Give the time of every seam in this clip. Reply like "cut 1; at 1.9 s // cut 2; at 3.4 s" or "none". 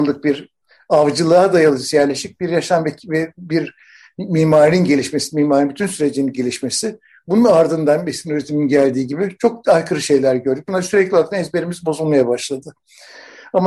none